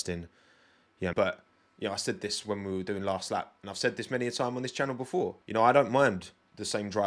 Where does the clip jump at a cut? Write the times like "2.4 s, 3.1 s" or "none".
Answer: 1.1 s, 5.4 s